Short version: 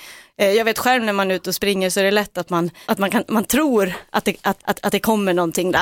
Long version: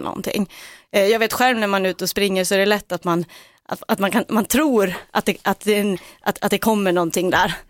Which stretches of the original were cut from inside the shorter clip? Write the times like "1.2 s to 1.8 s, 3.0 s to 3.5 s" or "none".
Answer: 3.4 s to 3.8 s, 5.6 s to 6.2 s

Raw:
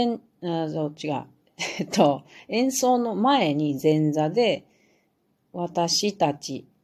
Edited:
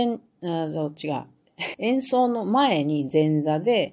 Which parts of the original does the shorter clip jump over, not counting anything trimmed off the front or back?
1.7 s to 2.4 s

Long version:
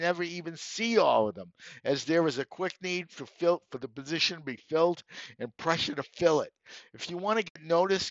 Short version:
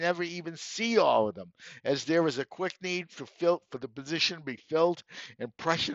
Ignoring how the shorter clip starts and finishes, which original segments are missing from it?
none

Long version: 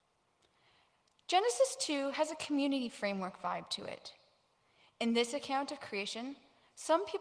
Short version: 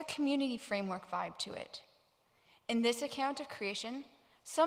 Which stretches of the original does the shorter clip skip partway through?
none

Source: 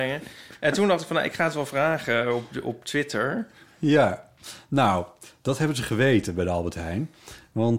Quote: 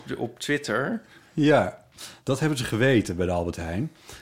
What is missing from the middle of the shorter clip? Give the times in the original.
4.7 s to 5.4 s

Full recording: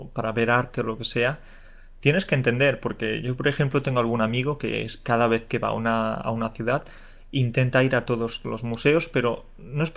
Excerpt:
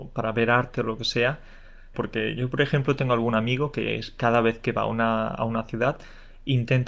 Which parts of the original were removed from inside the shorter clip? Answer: 1.9 s to 2.8 s

